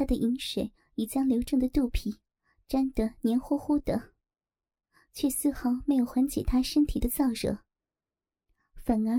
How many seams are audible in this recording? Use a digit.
0